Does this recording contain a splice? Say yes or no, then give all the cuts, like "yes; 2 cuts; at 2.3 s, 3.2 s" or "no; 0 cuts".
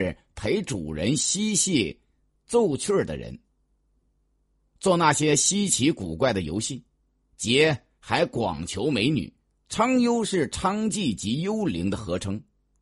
yes; 1 cut; at 9.5 s